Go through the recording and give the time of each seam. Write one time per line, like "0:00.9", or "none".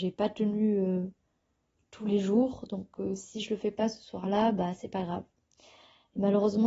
none

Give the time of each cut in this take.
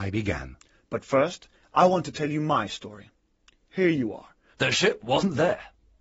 0:04.5

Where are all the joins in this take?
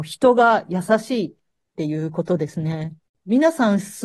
none

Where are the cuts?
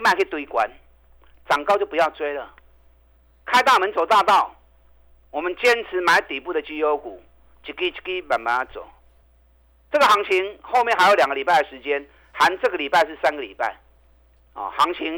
none

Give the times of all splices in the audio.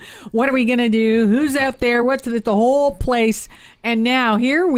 none

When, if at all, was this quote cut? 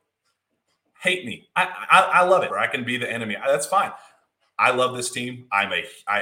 0:02.5

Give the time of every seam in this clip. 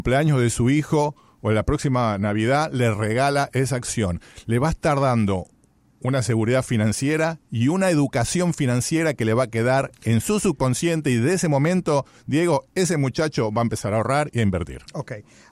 none

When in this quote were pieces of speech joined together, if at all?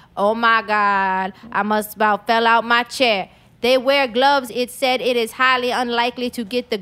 0:04.5

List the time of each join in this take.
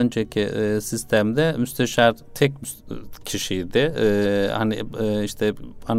none

